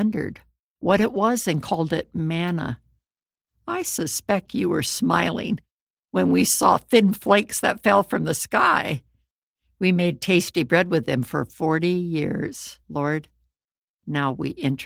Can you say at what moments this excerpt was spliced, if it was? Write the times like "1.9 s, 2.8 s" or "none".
12.8 s